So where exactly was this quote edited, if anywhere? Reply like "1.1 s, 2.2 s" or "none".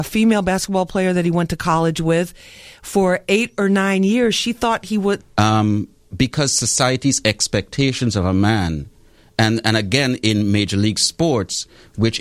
5.2 s